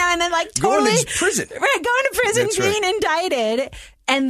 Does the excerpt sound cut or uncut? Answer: uncut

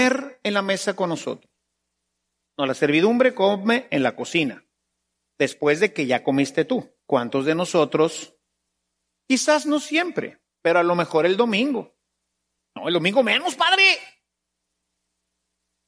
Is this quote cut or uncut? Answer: cut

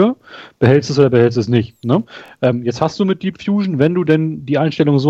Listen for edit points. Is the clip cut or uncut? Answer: uncut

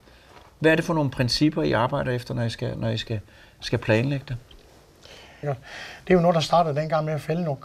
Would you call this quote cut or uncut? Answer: cut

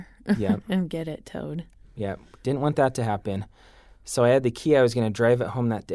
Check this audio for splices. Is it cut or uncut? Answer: uncut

